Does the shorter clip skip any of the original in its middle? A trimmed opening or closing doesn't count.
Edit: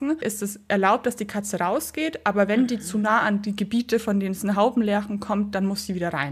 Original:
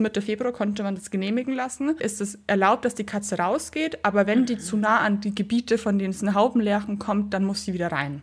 no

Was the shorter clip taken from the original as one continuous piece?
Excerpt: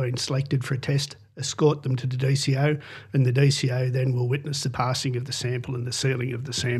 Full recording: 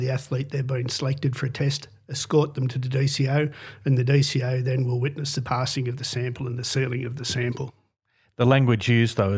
yes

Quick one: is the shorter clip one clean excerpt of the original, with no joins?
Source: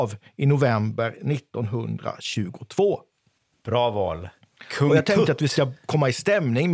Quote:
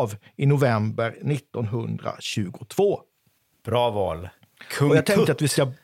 yes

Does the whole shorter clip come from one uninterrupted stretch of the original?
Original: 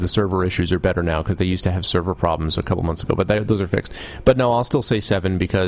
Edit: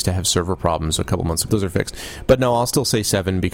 no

